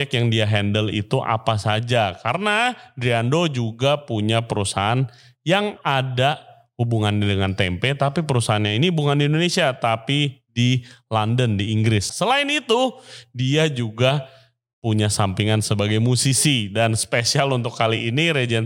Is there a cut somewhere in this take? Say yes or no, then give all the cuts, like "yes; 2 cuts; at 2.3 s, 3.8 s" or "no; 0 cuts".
yes; 1 cut; at 12.1 s